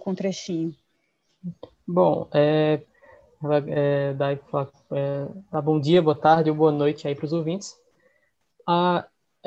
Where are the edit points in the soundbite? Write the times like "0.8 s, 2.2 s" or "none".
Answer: 2.9 s

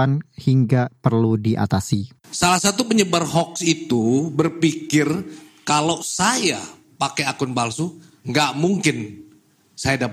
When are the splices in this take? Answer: none

